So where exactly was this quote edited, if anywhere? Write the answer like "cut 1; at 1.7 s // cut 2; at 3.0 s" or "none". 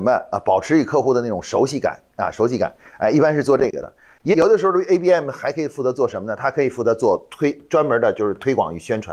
cut 1; at 4.3 s